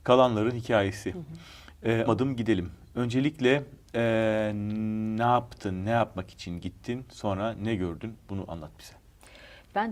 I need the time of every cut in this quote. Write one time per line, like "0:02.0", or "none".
0:02.1

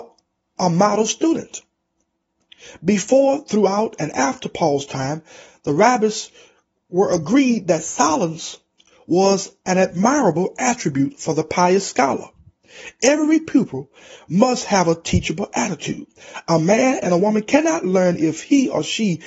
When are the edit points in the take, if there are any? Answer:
none

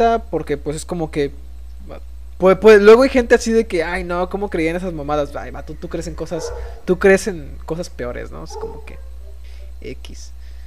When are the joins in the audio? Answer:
none

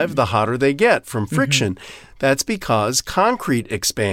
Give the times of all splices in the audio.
0:02.1

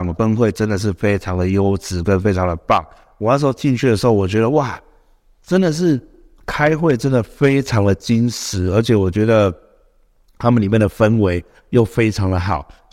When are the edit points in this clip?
none

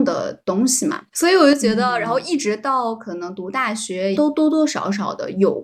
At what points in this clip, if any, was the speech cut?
0:01.1
0:04.1

